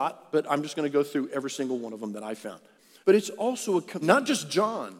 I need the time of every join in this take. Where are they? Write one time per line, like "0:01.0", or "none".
0:03.0
0:04.0

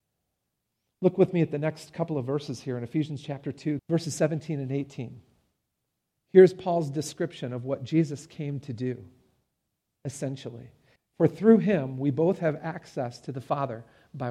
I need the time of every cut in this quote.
0:03.8
0:11.0

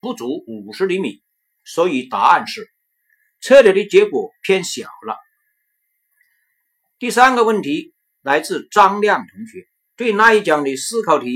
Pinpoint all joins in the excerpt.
0:09.9

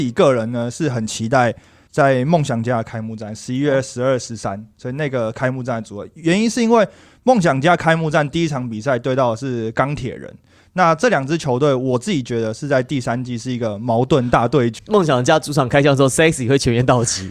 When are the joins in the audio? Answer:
0:14.8

